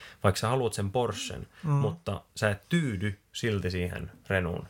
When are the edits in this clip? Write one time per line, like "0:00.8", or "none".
none